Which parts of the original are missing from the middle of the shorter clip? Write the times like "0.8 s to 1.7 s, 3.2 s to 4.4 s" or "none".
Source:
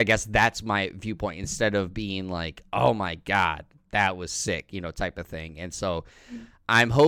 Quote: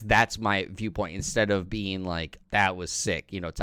2.7 s to 3.8 s